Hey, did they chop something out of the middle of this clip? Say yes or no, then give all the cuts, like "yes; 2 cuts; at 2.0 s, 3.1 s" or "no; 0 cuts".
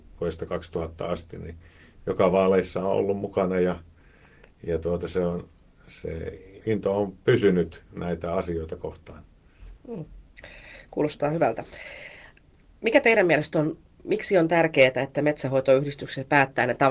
yes; 1 cut; at 6.6 s